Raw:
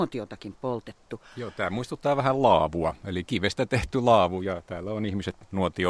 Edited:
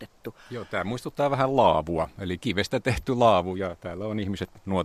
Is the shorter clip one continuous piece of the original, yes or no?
yes